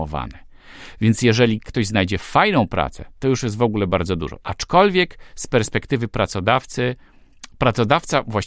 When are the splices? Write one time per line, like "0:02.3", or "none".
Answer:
0:04.4